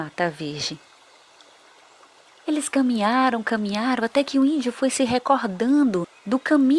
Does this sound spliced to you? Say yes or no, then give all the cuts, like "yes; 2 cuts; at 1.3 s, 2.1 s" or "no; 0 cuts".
no; 0 cuts